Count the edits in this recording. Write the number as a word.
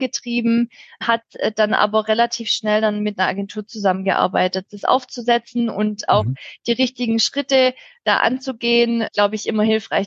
two